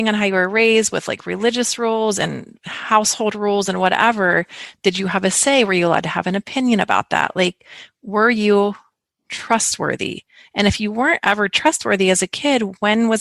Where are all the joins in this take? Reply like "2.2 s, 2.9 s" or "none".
none